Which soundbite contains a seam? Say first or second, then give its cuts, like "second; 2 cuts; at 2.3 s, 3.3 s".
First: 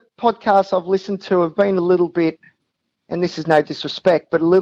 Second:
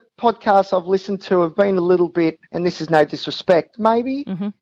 second; 2 cuts; at 2.4 s, 3.7 s